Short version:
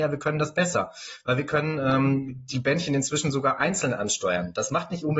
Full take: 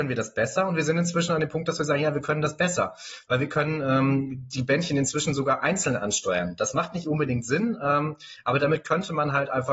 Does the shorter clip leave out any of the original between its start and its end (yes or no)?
no